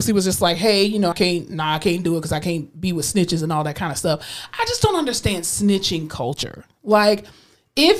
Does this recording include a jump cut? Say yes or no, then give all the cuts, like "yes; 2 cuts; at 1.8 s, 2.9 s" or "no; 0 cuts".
yes; 1 cut; at 1.1 s